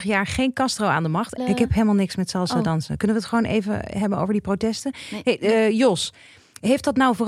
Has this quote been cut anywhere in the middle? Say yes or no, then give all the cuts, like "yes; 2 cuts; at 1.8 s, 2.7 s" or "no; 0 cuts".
yes; 1 cut; at 1.4 s